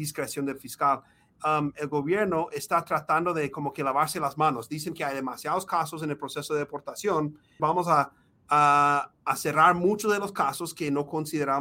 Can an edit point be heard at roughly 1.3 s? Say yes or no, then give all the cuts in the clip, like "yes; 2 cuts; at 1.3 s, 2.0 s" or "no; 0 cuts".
no; 1 cut; at 7.6 s